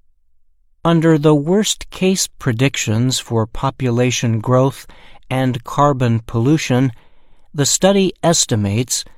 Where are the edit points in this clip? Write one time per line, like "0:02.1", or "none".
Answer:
none